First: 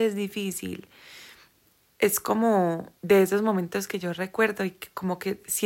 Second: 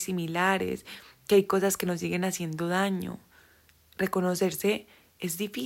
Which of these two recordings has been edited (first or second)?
first